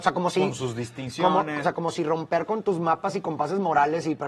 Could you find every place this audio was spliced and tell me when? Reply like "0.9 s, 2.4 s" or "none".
1.6 s